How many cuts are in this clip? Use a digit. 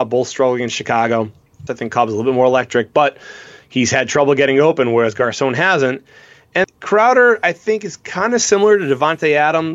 2